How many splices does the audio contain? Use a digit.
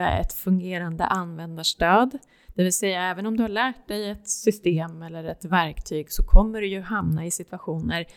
0